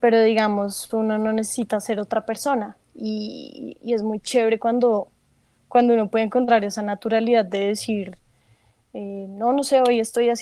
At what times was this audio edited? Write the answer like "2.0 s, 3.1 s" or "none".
none

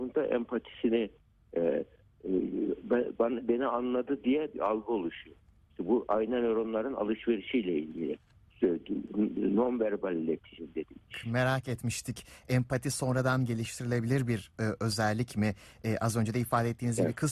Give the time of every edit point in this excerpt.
11.1 s

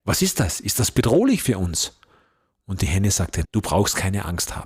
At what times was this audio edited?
3.4 s

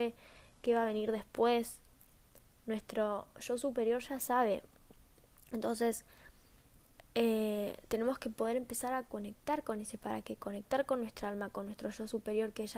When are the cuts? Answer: none

